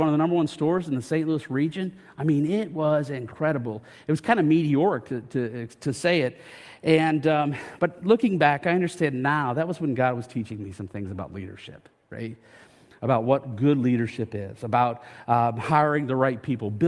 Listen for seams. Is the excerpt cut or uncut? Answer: uncut